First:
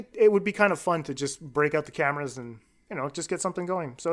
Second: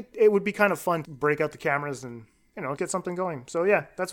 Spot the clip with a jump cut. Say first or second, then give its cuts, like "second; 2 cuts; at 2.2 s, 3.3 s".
second; 2 cuts; at 1.0 s, 2.8 s